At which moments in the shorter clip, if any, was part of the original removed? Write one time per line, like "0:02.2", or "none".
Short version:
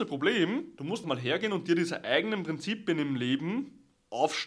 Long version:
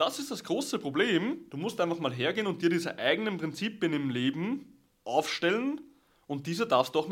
0:01.0